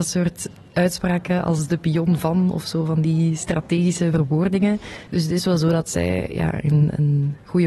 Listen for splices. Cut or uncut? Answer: cut